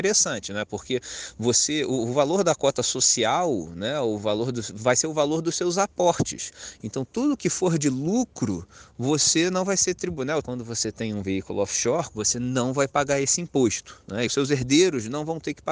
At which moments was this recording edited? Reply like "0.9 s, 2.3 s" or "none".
10.4 s, 12.1 s, 14.3 s